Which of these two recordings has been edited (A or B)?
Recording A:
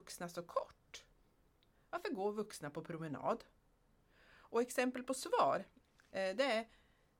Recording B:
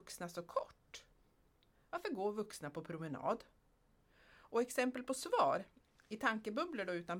A